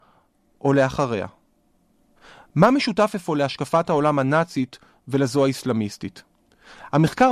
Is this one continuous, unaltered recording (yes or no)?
yes